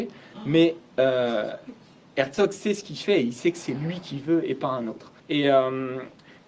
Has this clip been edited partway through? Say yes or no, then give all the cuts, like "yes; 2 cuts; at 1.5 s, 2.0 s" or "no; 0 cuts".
yes; 1 cut; at 5.2 s